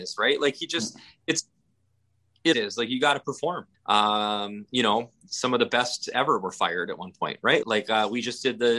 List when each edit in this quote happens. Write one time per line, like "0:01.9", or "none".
0:02.5
0:03.7
0:07.6